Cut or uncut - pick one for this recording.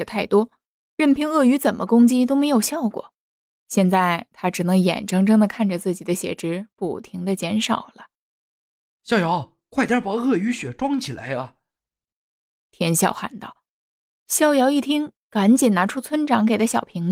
uncut